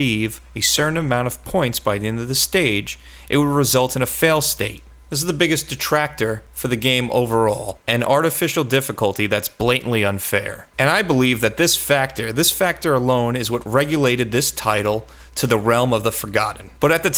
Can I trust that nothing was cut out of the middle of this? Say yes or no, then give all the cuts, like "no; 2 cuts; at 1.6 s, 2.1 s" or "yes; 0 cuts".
yes; 0 cuts